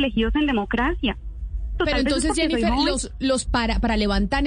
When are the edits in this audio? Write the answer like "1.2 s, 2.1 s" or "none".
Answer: 1.8 s, 3.5 s

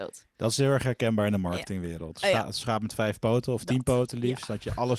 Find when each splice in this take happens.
none

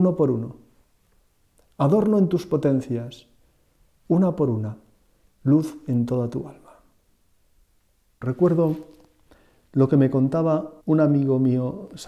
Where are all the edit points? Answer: 8.2 s, 10.8 s

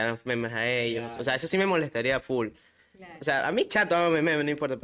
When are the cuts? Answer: none

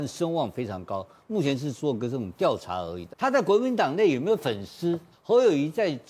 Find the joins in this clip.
3.1 s, 5.1 s

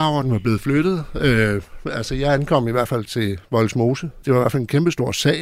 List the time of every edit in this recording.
4.2 s

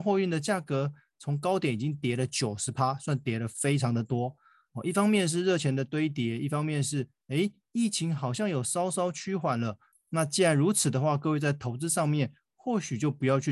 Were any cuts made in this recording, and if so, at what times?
9.9 s

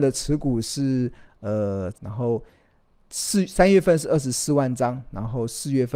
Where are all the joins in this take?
1.9 s

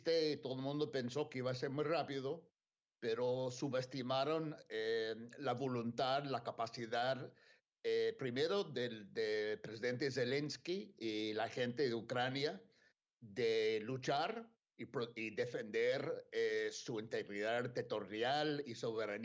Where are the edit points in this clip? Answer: none

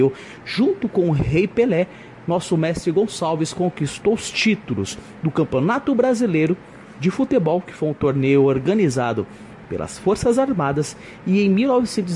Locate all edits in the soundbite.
none

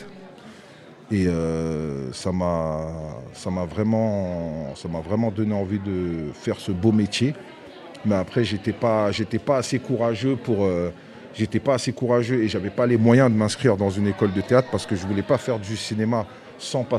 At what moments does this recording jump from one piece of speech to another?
none

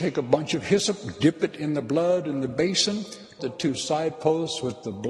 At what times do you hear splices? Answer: 3.4 s

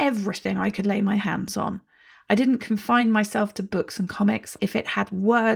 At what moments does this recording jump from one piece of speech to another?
4.6 s

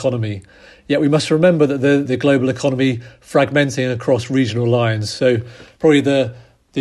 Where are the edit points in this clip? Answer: 2.0 s

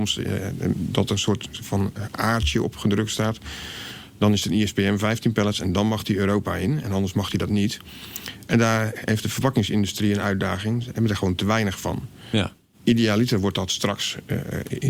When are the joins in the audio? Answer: none

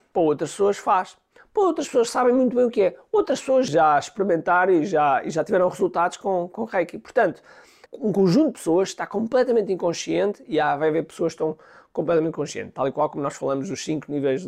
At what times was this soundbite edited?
7.8 s

